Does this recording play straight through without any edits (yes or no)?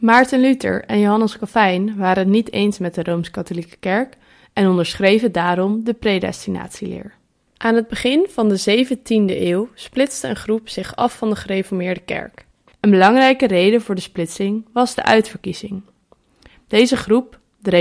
yes